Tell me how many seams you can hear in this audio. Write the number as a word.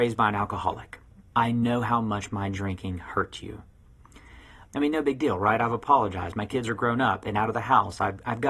two